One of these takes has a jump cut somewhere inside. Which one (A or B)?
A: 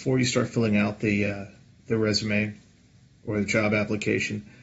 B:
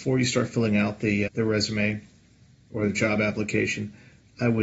B